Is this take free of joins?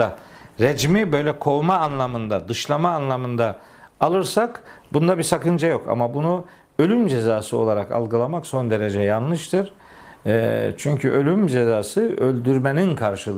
yes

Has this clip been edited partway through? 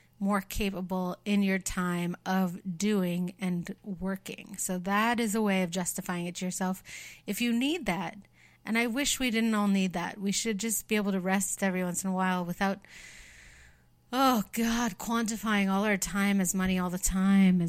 no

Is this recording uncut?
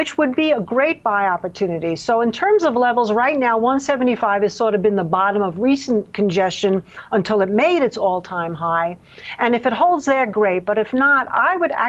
yes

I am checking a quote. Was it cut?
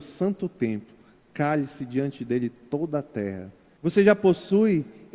yes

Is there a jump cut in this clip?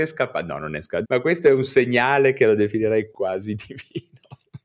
yes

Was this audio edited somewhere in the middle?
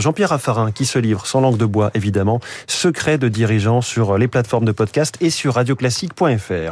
no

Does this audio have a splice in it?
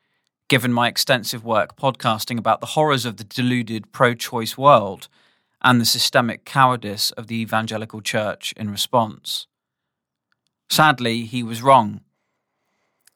no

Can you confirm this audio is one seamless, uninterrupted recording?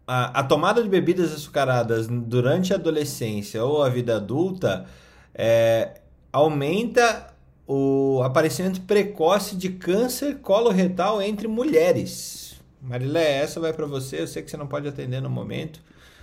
yes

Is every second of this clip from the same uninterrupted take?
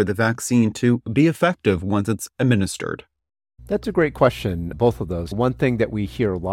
yes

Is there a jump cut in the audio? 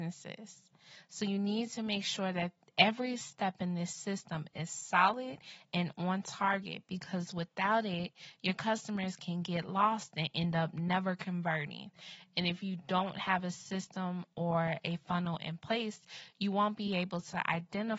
no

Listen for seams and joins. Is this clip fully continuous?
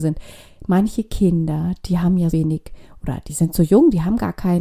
no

